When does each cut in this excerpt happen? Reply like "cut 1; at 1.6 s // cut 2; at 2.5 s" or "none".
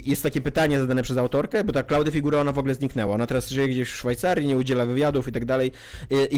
none